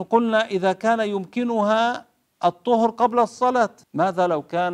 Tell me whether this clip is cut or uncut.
cut